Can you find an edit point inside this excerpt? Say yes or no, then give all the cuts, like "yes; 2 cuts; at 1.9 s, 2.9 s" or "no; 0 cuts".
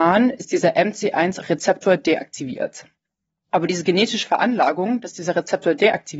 no; 0 cuts